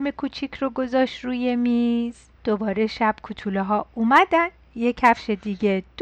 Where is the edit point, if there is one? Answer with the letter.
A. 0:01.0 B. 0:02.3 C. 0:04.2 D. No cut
B